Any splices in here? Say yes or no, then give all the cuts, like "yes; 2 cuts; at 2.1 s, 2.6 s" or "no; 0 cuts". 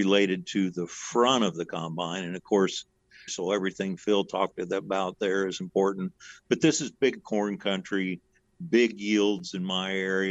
yes; 1 cut; at 3.3 s